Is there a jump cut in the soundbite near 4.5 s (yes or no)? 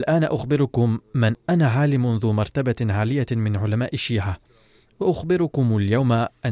no